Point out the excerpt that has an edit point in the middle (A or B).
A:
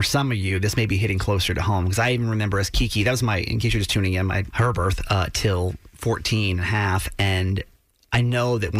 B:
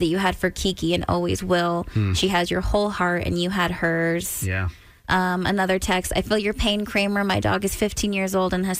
A